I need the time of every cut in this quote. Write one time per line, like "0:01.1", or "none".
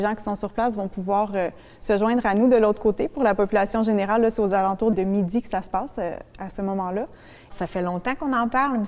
0:04.9
0:07.5